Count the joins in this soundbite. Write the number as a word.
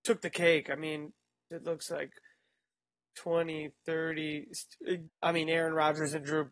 two